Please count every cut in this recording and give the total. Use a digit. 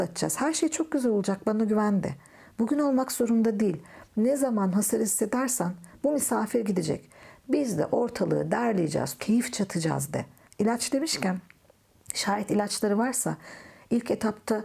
2